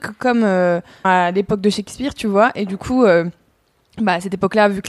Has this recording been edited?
yes; 1 cut; at 1.0 s

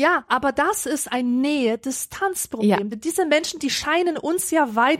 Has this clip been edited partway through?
no; 0 cuts

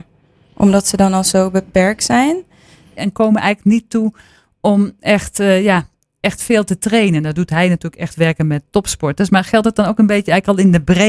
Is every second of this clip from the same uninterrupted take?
no; 1 cut; at 3.0 s

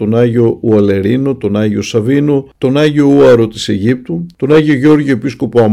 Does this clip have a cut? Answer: no; 0 cuts

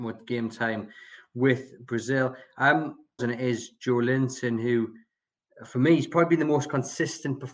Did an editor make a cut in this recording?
yes; 1 cut; at 3.2 s

